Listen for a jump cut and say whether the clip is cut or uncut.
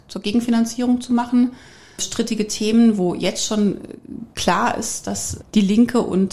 cut